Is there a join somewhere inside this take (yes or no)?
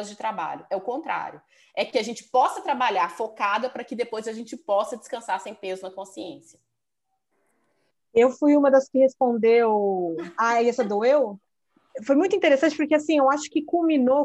no